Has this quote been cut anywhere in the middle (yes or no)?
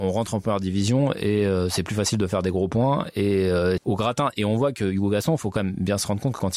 yes